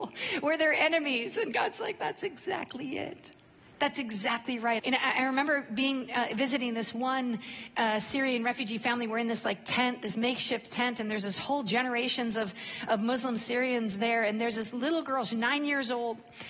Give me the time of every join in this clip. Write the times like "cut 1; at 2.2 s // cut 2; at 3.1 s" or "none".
cut 1; at 4.8 s